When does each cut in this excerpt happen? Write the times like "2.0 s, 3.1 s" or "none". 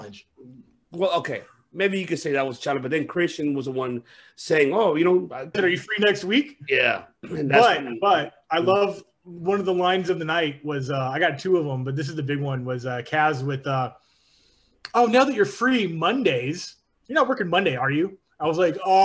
5.5 s

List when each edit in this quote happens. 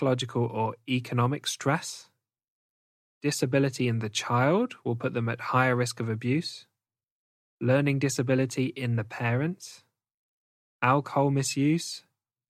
none

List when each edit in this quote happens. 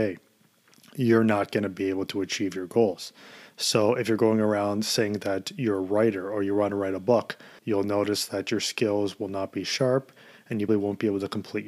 7.6 s, 10.7 s

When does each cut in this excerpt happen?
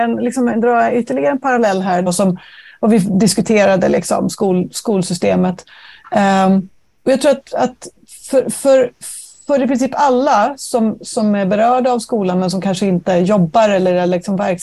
2.1 s

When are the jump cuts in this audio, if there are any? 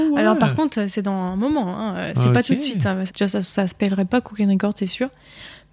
3.1 s

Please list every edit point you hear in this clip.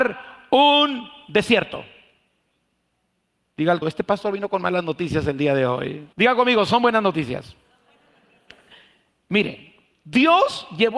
3.8 s, 6.1 s

